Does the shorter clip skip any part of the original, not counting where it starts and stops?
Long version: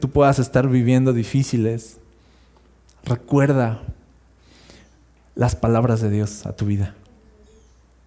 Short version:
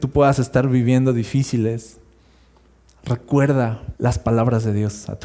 yes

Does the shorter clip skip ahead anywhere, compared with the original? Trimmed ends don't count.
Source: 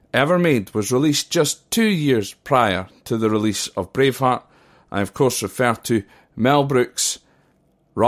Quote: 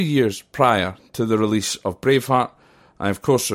no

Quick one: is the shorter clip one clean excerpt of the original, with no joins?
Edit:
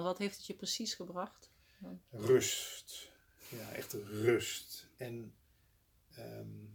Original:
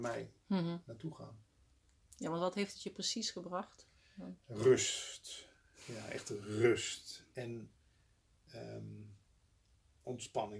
yes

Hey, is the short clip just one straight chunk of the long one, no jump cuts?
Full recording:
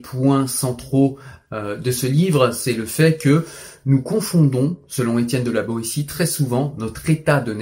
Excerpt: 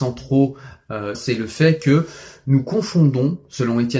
no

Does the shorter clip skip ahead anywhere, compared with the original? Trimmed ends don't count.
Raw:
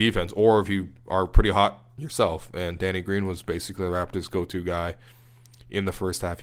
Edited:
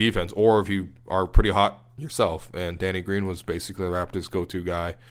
no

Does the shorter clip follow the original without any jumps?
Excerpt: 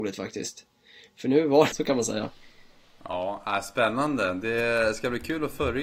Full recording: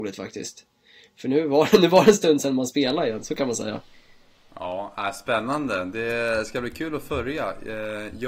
no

